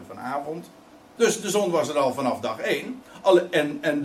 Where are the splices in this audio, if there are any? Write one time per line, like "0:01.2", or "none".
0:00.9